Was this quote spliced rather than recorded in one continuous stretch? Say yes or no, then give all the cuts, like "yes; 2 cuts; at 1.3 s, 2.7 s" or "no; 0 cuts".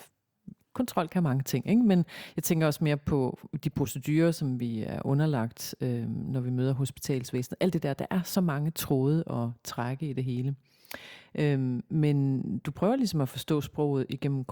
no; 0 cuts